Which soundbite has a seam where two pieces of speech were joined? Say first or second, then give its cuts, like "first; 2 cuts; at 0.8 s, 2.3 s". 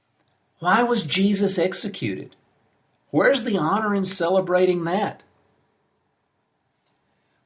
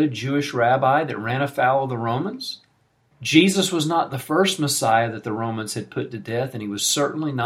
second; 1 cut; at 3.1 s